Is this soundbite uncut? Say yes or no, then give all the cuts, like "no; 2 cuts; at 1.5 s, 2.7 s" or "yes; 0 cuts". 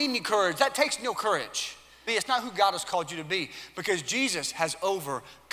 no; 1 cut; at 2.1 s